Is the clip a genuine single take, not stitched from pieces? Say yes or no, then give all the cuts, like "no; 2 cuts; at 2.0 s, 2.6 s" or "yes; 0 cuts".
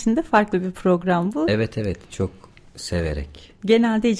yes; 0 cuts